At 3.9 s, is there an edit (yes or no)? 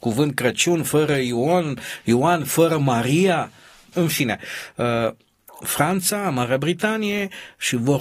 yes